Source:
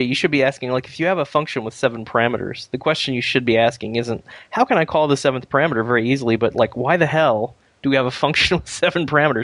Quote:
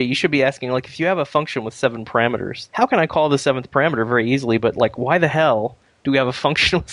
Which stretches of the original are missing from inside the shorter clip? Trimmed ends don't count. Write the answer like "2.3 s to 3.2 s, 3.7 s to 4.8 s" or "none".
2.7 s to 4.5 s